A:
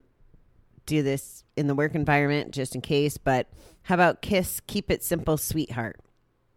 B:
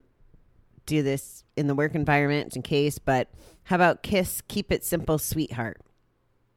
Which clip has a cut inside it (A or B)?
B